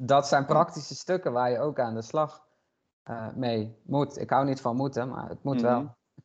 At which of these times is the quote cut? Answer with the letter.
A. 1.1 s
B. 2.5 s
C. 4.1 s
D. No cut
D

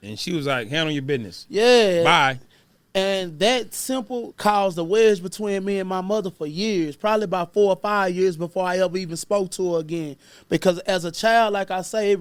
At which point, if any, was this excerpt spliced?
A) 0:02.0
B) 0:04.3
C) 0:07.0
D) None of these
B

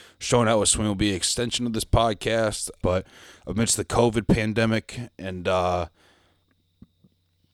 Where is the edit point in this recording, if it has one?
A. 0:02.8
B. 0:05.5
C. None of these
A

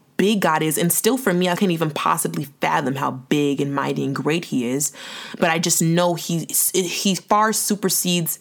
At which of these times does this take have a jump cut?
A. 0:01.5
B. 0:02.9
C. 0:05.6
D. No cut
A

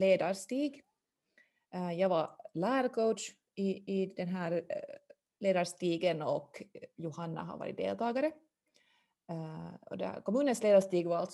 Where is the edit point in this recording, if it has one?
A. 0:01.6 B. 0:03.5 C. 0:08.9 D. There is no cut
D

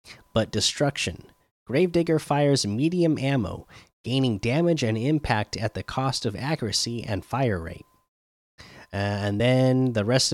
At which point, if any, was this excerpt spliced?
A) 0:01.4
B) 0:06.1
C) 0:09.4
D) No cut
D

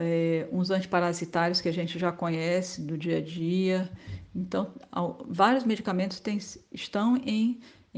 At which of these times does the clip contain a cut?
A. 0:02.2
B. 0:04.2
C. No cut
C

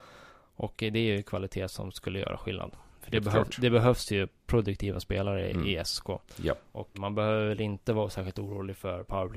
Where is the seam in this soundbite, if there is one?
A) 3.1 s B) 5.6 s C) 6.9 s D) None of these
C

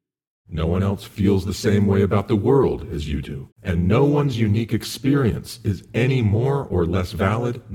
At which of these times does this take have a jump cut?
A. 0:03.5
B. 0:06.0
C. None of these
A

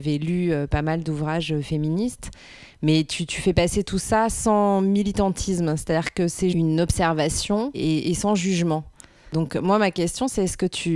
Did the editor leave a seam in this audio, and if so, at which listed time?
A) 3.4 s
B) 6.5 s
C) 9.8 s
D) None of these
B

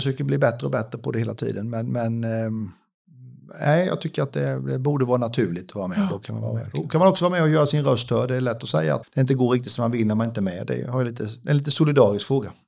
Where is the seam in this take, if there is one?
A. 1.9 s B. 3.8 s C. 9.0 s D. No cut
C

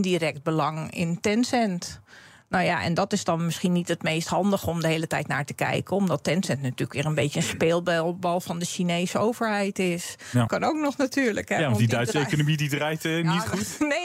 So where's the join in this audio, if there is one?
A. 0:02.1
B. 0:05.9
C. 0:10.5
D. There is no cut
C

